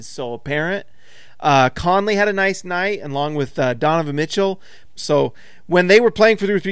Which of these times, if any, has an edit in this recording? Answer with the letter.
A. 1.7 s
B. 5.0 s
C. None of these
B